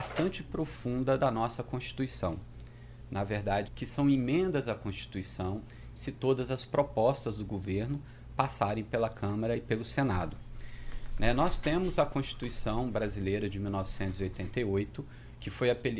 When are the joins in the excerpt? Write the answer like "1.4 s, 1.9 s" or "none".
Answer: 3.7 s, 6.0 s